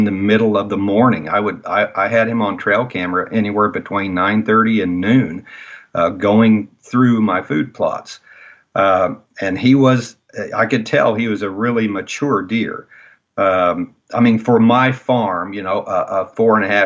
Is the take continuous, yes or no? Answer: yes